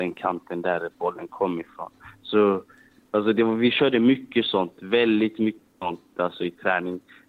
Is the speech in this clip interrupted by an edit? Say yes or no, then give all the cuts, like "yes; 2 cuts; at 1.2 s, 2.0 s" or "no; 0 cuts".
no; 0 cuts